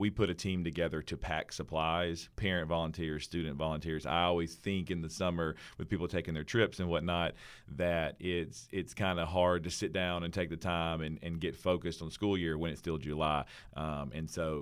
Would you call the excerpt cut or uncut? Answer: cut